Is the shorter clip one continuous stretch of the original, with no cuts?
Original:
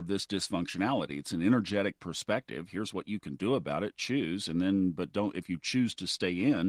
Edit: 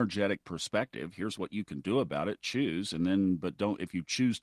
yes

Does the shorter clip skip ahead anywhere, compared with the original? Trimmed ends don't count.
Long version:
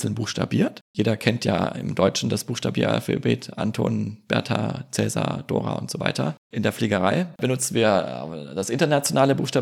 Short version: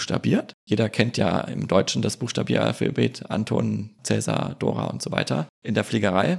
yes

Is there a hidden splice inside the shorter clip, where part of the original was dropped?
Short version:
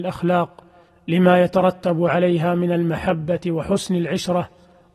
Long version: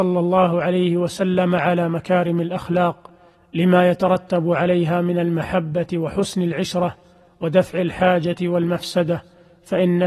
no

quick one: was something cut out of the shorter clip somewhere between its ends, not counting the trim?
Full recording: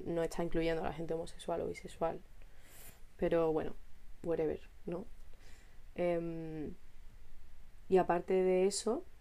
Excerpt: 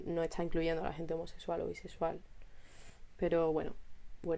no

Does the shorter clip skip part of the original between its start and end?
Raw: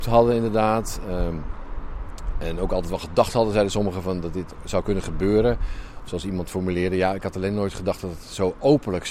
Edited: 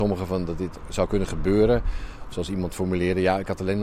no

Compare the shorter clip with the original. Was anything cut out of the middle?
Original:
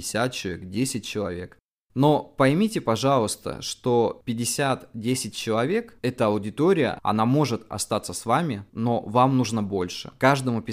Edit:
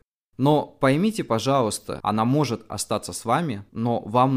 yes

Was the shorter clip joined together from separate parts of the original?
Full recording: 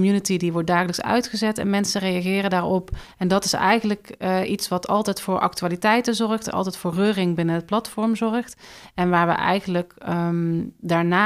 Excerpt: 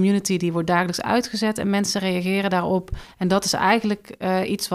no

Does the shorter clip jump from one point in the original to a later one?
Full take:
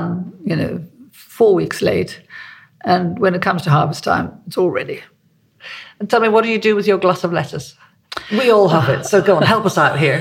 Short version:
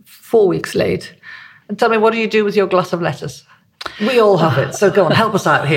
yes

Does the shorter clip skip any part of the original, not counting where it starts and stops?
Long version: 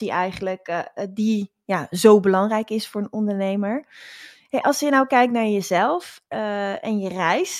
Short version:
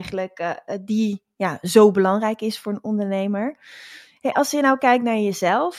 no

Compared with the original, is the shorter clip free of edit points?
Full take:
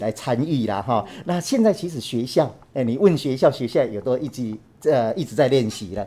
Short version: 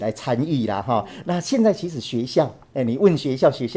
yes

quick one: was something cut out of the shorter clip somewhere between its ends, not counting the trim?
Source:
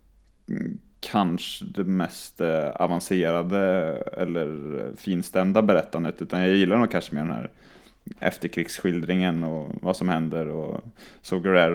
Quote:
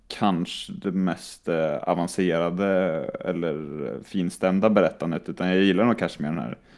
no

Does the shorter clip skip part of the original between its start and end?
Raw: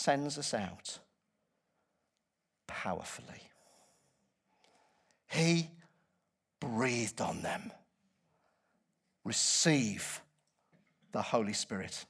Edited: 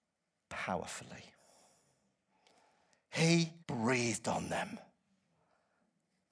yes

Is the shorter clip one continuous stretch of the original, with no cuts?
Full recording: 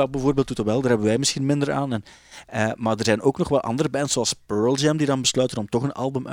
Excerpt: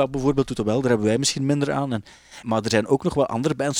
no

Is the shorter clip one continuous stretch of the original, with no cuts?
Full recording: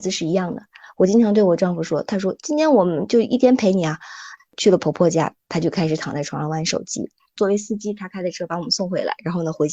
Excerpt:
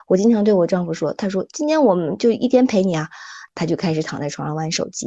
no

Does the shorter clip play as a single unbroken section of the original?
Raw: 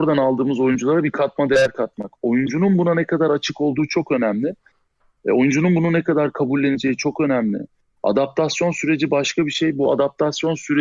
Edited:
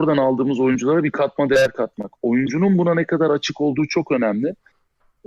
yes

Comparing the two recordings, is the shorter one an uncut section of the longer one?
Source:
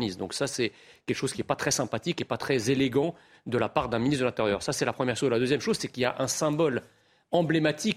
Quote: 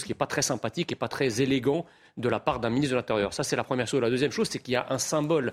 yes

